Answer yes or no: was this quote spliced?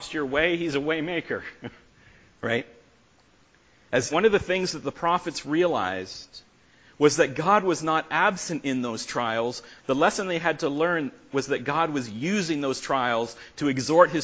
yes